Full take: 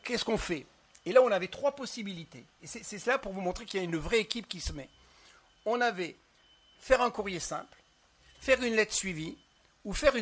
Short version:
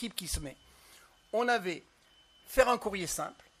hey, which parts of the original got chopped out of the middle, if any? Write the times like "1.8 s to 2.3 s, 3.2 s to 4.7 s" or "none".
none